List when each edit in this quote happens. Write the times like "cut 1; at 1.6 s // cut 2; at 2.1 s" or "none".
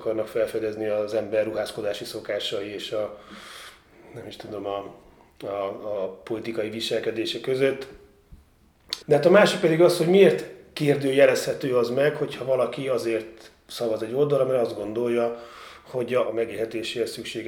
cut 1; at 9.0 s // cut 2; at 16.3 s